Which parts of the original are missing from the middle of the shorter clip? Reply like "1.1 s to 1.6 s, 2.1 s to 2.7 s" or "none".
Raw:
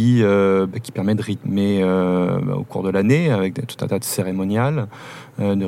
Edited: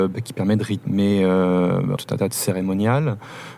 2.5 s to 3.7 s